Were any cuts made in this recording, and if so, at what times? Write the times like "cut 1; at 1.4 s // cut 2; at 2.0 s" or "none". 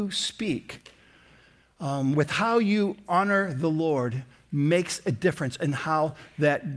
cut 1; at 2.1 s